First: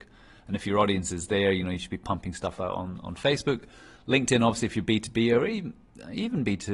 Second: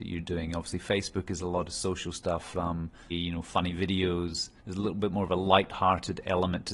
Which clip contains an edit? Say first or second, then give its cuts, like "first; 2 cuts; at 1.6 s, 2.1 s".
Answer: second; 2 cuts; at 3.1 s, 4.6 s